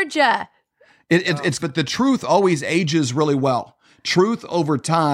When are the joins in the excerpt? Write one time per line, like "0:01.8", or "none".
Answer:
0:01.6